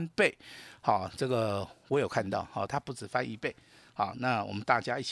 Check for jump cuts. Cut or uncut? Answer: cut